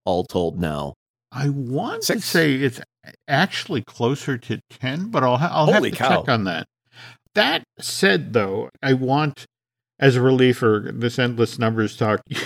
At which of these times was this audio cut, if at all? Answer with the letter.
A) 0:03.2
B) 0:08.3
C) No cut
C